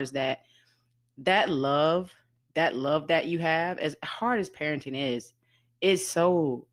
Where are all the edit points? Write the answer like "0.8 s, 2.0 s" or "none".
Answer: none